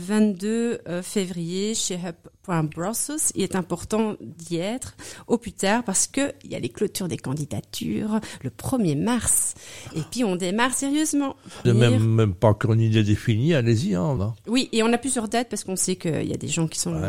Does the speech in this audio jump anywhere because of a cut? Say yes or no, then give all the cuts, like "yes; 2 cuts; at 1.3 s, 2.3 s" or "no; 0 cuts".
yes; 2 cuts; at 11.6 s, 14.2 s